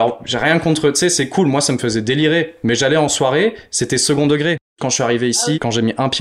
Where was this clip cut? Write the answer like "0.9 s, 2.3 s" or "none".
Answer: 4.7 s